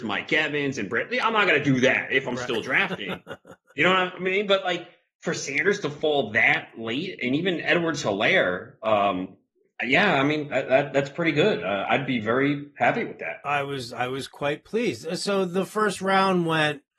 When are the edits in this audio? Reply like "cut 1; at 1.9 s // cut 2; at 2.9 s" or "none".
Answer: none